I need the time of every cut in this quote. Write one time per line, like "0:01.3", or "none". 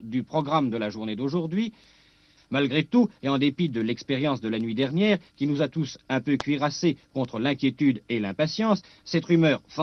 0:02.4